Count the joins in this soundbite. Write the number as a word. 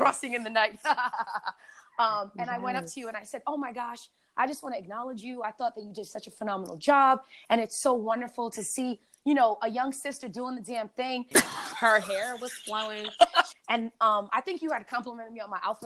two